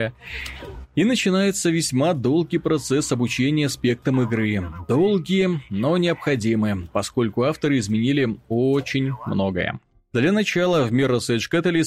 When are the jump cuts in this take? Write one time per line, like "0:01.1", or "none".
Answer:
none